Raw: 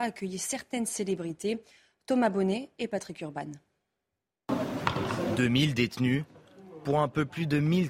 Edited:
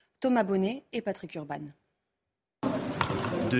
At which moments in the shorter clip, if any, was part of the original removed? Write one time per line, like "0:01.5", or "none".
none